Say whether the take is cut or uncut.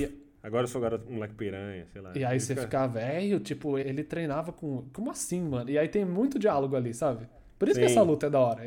cut